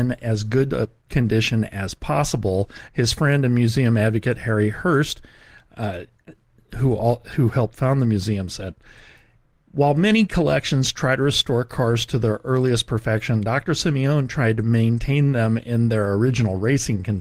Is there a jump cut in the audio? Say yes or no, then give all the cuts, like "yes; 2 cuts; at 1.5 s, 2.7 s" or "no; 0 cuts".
no; 0 cuts